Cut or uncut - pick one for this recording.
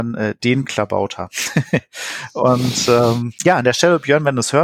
uncut